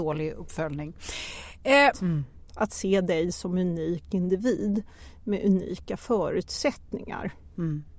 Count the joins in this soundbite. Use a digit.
1